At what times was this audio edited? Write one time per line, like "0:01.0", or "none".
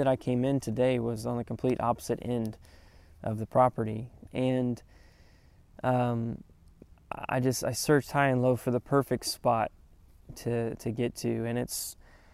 0:04.3